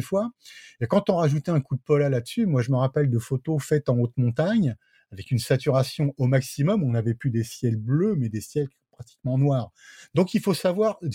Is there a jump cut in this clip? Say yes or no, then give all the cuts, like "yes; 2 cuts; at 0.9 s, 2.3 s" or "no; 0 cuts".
no; 0 cuts